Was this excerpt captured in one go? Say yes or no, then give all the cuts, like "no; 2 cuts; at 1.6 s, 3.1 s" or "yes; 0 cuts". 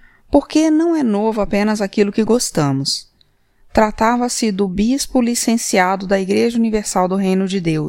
yes; 0 cuts